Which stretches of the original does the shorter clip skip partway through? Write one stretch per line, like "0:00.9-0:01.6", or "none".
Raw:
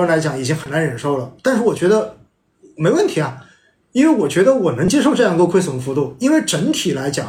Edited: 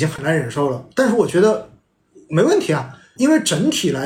0:03.6-0:06.2